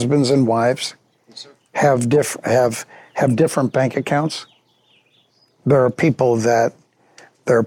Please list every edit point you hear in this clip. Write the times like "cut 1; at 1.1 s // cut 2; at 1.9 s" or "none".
none